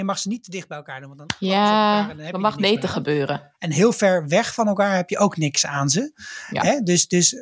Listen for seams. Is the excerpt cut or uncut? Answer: uncut